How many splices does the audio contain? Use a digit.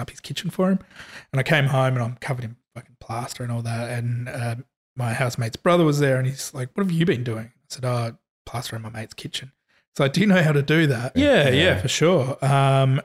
1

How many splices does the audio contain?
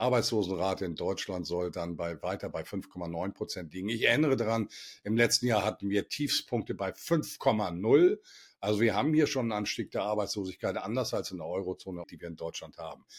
1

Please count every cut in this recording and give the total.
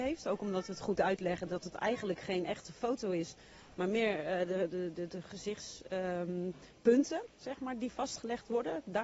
0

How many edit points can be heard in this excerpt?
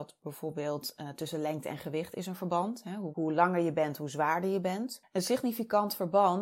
1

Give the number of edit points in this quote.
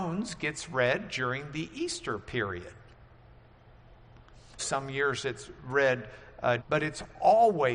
2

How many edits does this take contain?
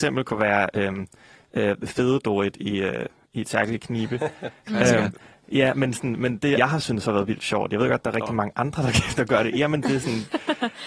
1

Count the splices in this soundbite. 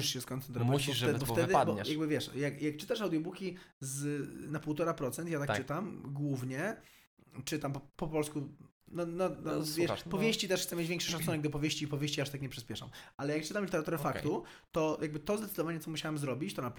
1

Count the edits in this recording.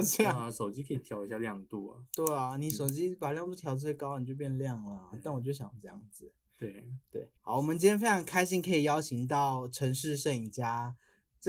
1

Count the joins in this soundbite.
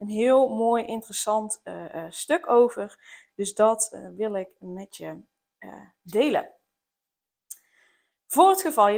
0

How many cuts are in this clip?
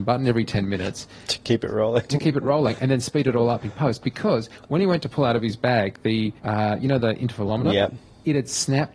1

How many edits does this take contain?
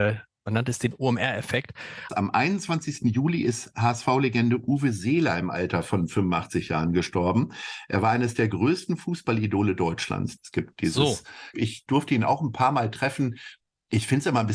3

